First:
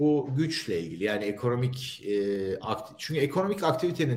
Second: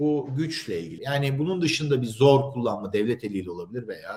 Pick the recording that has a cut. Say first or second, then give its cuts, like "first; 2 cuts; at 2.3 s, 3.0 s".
second; 1 cut; at 1.0 s